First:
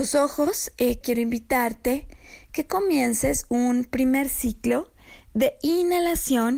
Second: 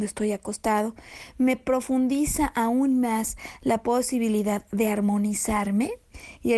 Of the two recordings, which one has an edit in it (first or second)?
first